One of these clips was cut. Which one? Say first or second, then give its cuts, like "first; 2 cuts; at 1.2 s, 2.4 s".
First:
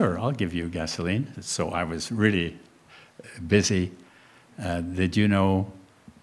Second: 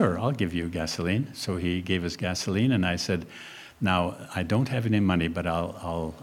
first; 1 cut; at 1.3 s